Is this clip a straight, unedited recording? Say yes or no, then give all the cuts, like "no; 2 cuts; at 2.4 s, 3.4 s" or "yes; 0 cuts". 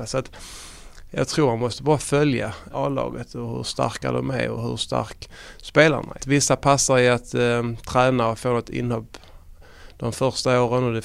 no; 2 cuts; at 2.7 s, 6.2 s